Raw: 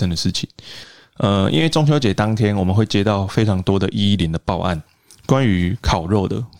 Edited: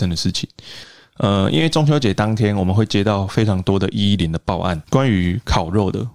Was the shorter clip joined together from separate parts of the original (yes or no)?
yes